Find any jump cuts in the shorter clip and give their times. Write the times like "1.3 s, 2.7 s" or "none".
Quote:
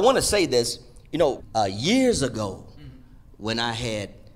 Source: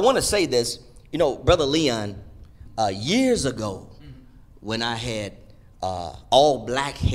1.4 s